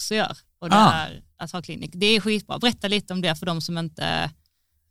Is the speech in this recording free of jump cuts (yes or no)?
yes